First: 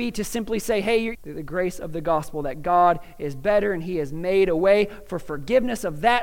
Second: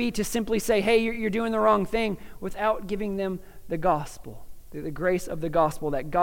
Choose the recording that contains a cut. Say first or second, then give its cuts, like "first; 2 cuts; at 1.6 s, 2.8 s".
first; 1 cut; at 1.1 s